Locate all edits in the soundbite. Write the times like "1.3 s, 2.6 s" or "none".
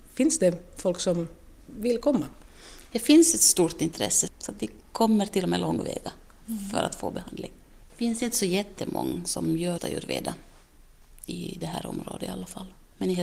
9.8 s